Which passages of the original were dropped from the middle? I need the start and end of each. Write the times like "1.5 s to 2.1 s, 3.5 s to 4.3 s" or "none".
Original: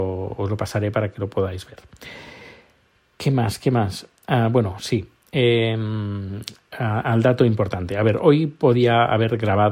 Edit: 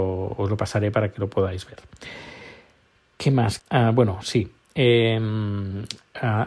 3.6 s to 4.2 s